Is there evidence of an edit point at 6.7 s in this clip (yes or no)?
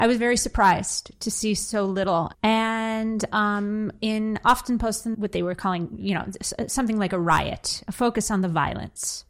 no